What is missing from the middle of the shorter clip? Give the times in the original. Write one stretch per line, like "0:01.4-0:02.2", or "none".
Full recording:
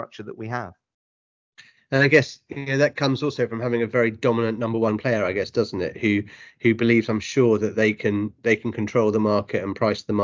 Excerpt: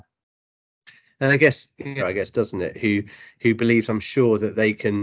0:02.7-0:05.2